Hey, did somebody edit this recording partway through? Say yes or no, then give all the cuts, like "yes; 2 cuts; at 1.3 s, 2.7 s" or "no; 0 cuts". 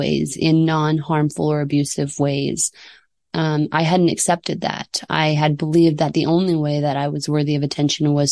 no; 0 cuts